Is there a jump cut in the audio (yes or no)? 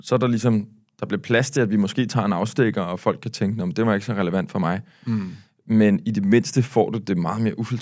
no